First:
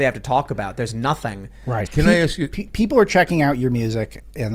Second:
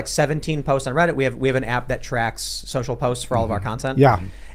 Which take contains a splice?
first; 1 cut; at 1.9 s

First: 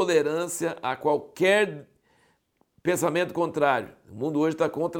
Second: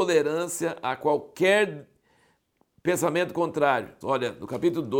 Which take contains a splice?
second; 1 cut; at 4.0 s

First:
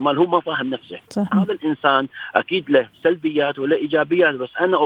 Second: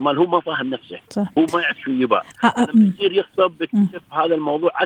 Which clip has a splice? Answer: first; 1 cut; at 1.3 s

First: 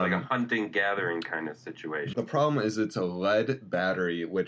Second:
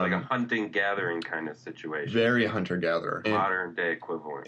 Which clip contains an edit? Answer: first; 1 cut; at 2.1 s

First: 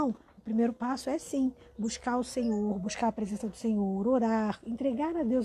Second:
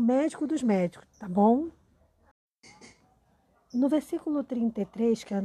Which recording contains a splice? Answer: second; 1 cut; at 1.0 s

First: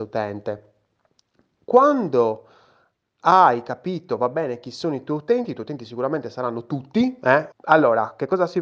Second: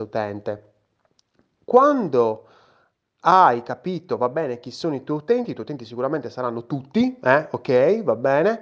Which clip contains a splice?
first; 1 cut; at 7.5 s

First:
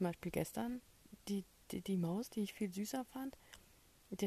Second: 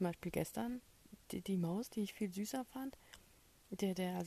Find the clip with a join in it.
second; 1 cut; at 1.2 s

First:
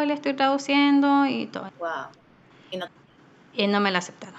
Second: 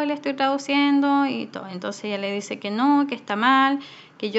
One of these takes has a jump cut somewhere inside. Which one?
first; 2 cuts; at 1.7 s, 2.9 s

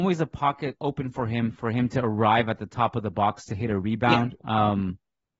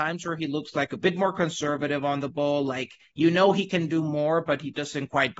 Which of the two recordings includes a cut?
first; 1 cut; at 4.4 s

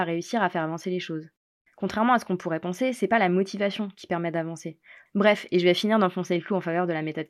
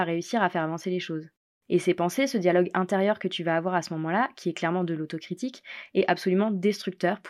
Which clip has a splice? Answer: first; 2 cuts; at 1.6 s, 5.1 s

